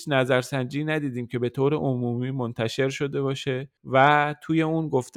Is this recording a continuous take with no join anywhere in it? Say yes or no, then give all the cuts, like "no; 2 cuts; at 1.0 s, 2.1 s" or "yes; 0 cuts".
yes; 0 cuts